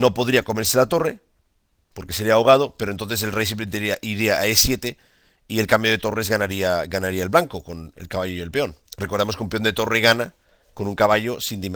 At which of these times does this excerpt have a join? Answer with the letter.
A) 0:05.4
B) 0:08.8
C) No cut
B